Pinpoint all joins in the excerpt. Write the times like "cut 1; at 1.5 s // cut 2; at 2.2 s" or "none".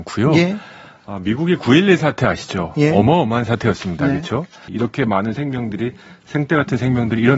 cut 1; at 4.7 s